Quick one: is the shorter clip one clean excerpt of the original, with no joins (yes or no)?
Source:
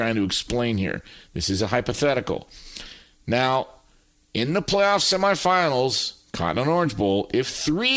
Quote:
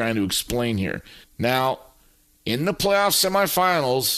no